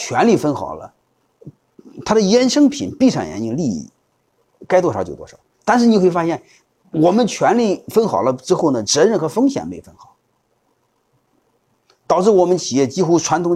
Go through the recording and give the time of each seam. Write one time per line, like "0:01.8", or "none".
none